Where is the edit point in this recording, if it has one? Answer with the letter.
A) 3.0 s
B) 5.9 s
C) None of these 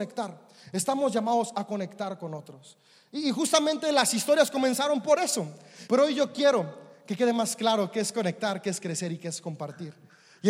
B